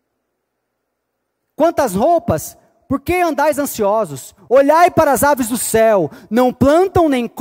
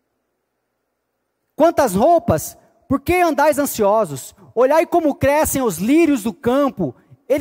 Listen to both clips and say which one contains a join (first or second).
first